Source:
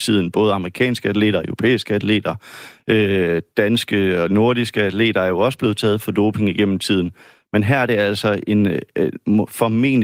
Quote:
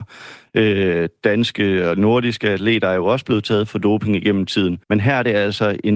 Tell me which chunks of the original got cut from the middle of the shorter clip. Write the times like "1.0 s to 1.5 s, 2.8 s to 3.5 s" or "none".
7.2 s to 7.5 s